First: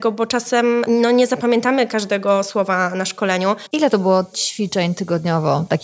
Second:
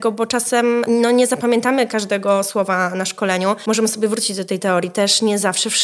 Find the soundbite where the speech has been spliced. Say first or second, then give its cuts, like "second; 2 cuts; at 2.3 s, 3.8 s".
first; 1 cut; at 3.7 s